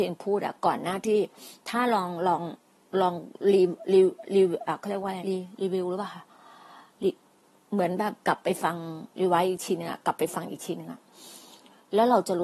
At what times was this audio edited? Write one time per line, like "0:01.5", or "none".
0:05.2
0:08.2